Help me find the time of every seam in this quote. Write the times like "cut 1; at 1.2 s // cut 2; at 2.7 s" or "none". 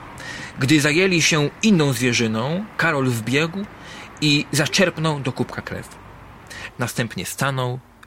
cut 1; at 6.7 s